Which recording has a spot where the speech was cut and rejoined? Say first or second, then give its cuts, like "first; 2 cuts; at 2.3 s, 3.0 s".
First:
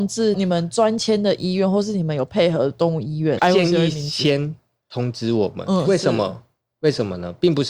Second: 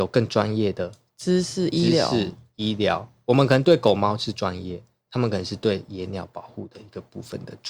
first; 1 cut; at 3.4 s